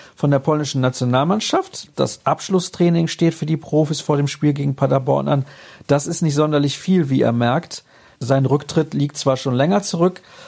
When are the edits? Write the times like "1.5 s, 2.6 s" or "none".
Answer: 1.9 s, 8.2 s